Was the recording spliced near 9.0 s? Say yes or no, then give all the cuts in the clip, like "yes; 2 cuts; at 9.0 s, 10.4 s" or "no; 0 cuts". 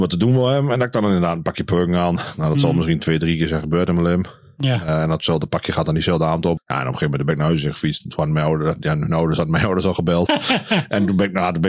no; 2 cuts; at 6.6 s, 10.3 s